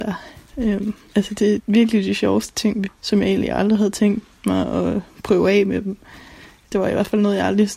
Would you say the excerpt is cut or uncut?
cut